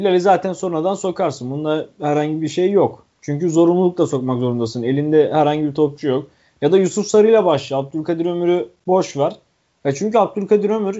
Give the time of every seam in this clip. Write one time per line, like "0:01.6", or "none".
none